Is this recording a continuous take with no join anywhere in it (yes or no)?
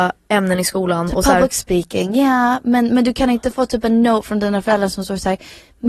yes